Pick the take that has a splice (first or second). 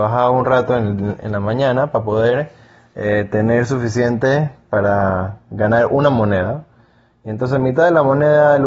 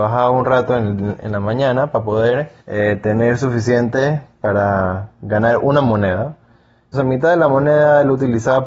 second